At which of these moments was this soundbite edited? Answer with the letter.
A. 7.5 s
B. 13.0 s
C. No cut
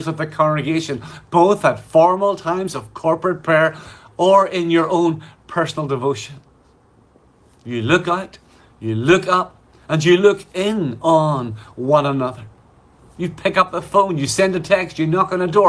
C